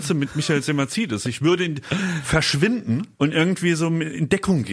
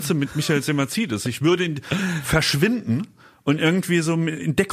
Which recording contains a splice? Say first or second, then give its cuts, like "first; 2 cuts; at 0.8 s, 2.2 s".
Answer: first; 1 cut; at 3.1 s